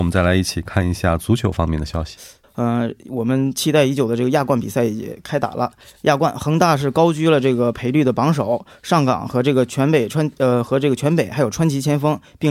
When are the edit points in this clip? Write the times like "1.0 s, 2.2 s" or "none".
2.4 s